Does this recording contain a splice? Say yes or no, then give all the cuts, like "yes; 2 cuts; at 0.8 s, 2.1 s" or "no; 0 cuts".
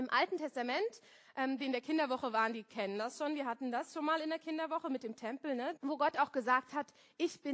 yes; 2 cuts; at 1.6 s, 5.8 s